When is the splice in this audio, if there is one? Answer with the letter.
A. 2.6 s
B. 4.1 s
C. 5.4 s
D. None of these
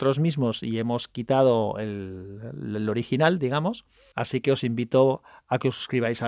B